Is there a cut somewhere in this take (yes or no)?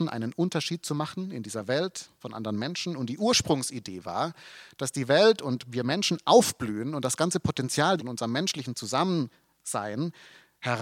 yes